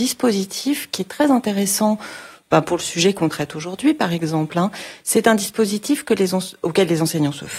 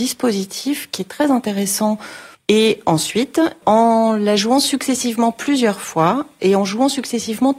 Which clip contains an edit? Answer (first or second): second